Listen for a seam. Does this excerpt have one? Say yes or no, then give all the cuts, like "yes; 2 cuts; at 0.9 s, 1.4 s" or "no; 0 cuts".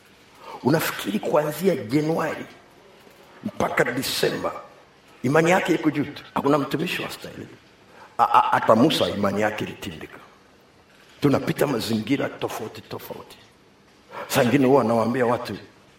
yes; 1 cut; at 6.3 s